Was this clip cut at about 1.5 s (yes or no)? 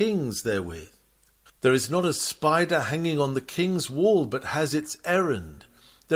yes